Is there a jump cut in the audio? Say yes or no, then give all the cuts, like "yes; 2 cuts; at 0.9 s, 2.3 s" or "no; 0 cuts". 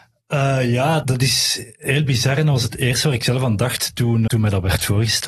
yes; 2 cuts; at 1.0 s, 4.3 s